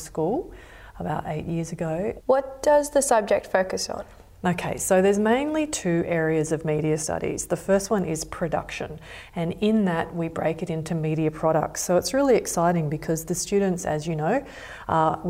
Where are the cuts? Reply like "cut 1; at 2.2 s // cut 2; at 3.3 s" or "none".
cut 1; at 2.2 s